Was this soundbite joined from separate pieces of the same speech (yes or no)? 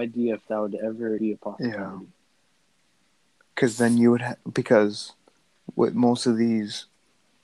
yes